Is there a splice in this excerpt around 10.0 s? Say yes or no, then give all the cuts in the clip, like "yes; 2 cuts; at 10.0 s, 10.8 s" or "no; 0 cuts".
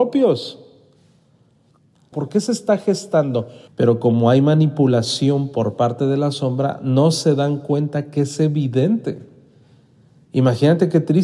no; 2 cuts; at 2.1 s, 3.7 s